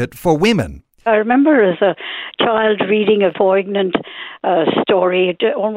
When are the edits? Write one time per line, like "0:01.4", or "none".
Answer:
0:01.1
0:03.3